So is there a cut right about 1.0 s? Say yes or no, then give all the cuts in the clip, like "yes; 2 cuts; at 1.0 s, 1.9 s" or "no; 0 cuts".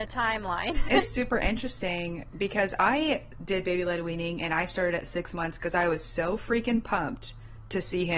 yes; 1 cut; at 1.0 s